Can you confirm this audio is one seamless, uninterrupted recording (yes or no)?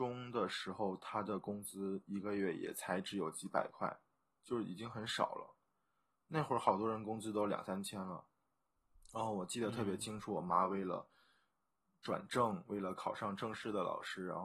yes